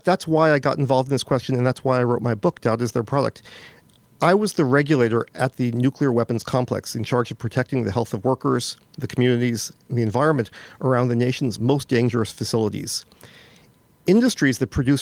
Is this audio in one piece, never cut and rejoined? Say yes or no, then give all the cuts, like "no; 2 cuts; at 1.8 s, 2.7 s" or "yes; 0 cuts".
yes; 0 cuts